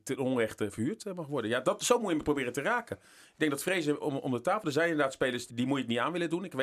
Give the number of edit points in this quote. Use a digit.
1